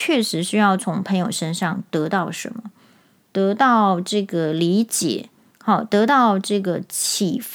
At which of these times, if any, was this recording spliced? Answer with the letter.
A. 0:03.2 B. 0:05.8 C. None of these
A